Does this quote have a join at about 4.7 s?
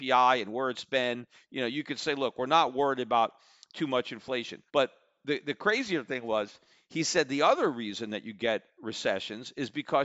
yes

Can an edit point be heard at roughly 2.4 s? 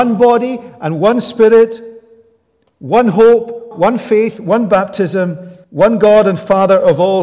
no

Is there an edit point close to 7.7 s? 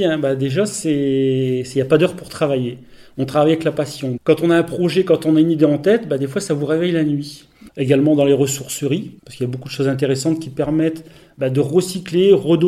yes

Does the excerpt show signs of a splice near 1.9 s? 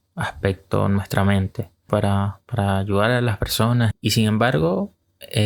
yes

